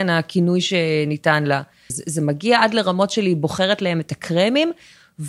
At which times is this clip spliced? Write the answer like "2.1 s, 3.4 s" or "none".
1.9 s